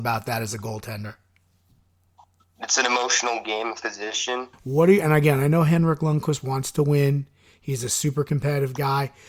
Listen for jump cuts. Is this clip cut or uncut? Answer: cut